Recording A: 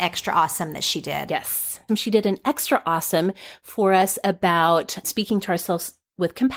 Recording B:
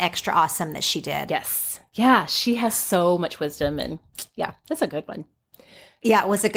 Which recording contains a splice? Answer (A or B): A